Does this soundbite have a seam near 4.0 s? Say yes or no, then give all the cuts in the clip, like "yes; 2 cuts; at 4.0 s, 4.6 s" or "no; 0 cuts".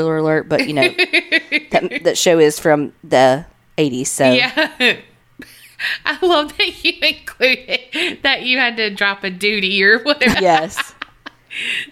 no; 1 cut; at 10.3 s